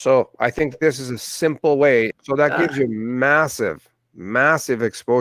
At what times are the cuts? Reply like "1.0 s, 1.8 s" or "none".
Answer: 2.1 s